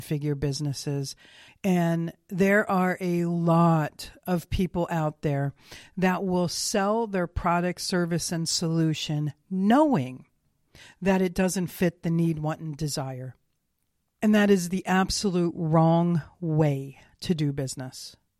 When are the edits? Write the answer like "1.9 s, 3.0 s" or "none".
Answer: 1.5 s